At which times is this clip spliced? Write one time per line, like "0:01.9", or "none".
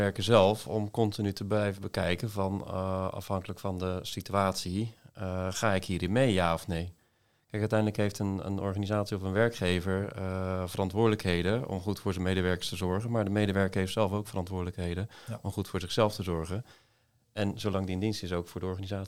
none